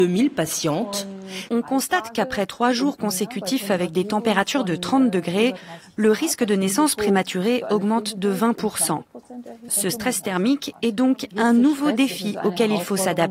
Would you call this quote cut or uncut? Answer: cut